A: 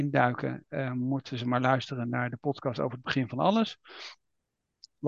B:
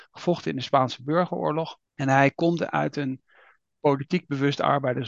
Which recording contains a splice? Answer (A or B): B